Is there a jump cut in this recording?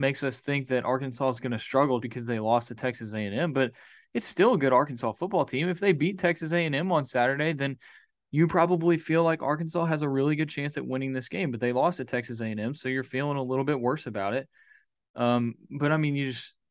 yes; 2 cuts; at 2.0 s, 15.1 s

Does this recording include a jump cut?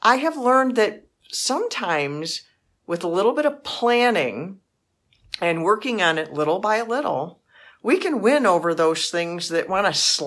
no; 0 cuts

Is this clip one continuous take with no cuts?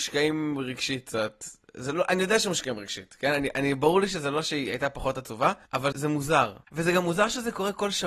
no; 1 cut; at 5.9 s

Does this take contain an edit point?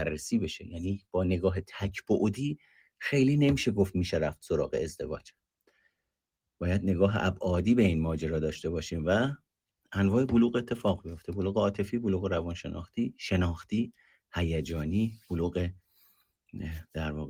no; 0 cuts

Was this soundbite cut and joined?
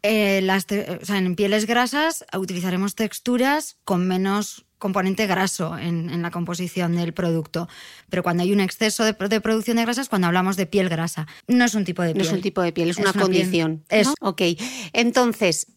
yes; 3 cuts; at 8.0 s, 11.4 s, 14.1 s

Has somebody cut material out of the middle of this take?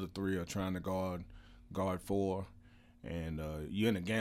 no; 0 cuts

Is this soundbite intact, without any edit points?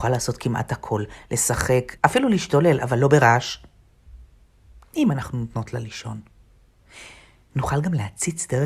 no; 2 cuts; at 2.0 s, 4.8 s

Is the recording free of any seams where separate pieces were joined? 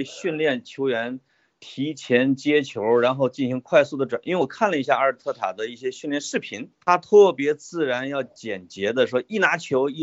no; 1 cut; at 6.7 s

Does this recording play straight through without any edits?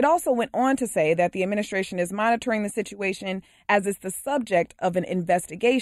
yes; 0 cuts

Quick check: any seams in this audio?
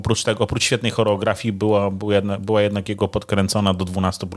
no; 0 cuts

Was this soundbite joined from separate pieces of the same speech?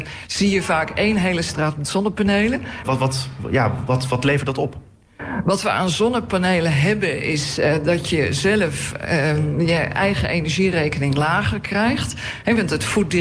yes; 1 cut; at 2.8 s

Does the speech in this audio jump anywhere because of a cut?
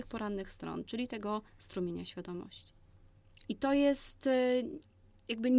yes; 1 cut; at 3.4 s

